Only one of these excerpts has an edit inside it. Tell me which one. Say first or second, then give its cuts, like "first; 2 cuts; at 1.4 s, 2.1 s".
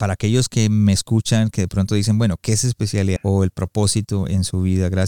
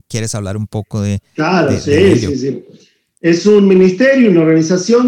first; 1 cut; at 3.2 s